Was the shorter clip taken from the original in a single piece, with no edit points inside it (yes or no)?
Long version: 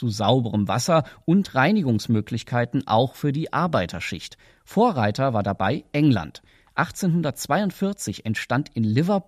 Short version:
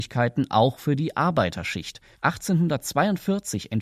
no